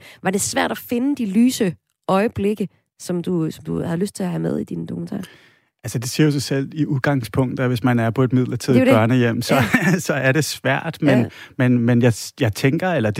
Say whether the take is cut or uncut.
uncut